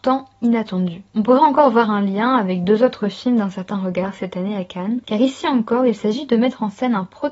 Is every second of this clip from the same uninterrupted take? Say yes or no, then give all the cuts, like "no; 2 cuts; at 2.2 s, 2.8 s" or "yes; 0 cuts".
no; 1 cut; at 5.0 s